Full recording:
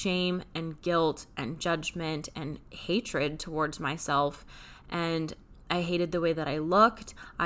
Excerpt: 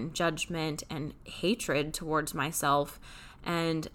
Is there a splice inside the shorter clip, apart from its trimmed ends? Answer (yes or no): no